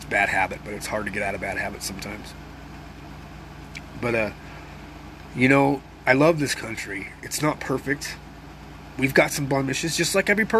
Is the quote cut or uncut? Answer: uncut